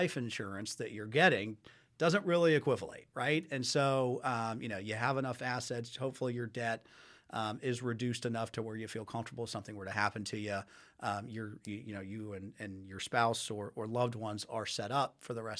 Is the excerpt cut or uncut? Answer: uncut